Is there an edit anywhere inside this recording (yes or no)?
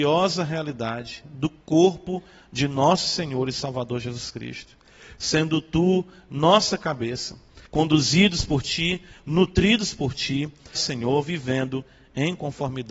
yes